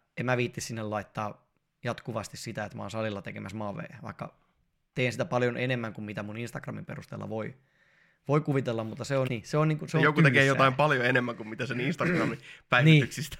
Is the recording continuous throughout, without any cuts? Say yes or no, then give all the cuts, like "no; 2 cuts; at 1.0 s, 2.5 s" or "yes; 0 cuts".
no; 1 cut; at 9.3 s